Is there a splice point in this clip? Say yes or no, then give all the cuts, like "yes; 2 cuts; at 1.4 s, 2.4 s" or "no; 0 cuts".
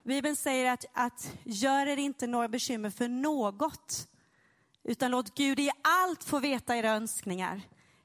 no; 0 cuts